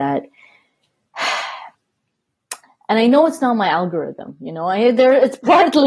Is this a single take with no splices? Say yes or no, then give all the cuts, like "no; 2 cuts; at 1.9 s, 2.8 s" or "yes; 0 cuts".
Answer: yes; 0 cuts